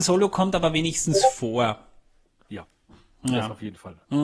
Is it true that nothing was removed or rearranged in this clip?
yes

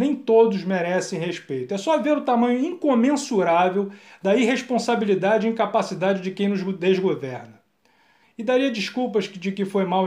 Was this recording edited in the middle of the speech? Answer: yes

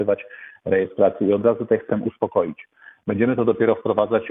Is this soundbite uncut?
yes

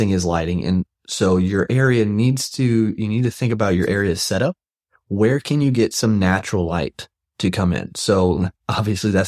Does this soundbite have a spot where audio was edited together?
no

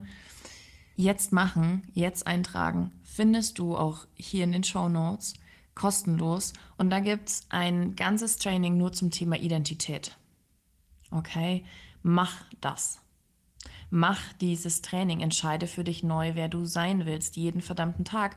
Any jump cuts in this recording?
no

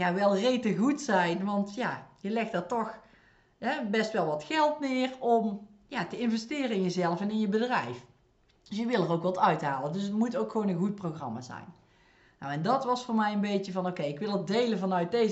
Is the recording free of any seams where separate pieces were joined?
yes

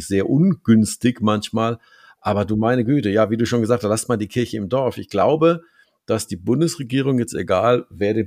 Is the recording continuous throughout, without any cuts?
yes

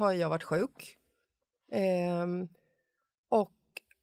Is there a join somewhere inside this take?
no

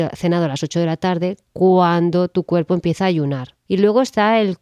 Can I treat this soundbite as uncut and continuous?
no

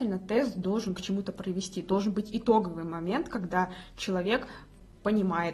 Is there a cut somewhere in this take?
no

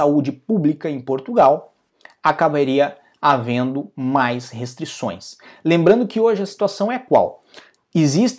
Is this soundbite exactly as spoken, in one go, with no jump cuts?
yes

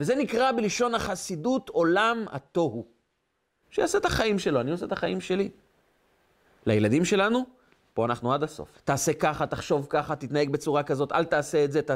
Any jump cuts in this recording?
yes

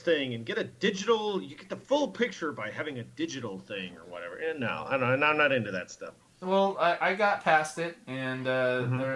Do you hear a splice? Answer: no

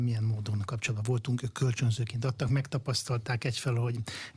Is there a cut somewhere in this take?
no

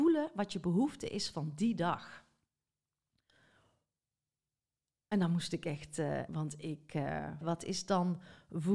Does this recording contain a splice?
yes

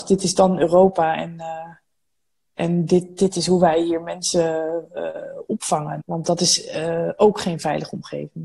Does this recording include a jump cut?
yes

